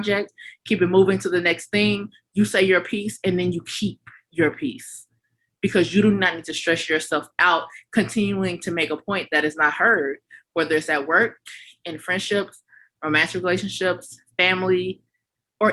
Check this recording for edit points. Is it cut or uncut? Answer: uncut